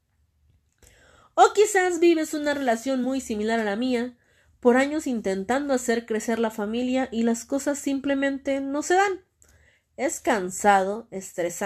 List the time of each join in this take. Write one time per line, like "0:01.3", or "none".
none